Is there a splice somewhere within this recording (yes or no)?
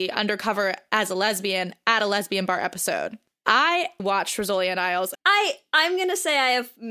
yes